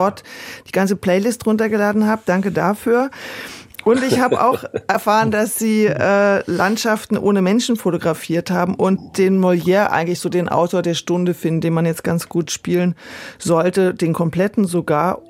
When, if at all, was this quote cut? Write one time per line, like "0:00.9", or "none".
none

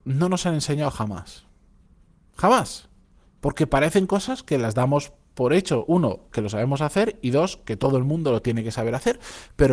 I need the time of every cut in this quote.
none

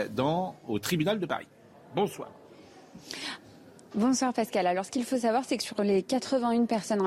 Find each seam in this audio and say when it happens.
none

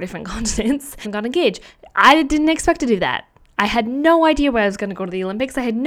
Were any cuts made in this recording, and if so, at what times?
0:01.0

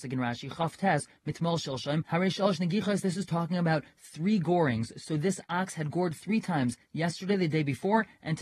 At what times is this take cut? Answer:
none

